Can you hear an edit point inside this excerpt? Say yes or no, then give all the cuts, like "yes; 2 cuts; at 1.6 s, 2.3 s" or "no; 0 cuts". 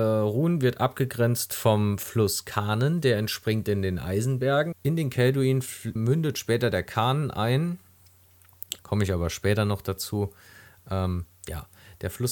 yes; 3 cuts; at 4.7 s, 6.0 s, 8.8 s